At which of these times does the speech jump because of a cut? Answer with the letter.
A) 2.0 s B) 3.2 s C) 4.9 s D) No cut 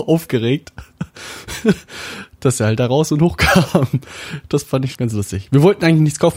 C